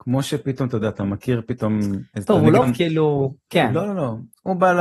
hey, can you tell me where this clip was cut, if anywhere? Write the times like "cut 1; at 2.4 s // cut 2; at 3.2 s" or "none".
cut 1; at 2.6 s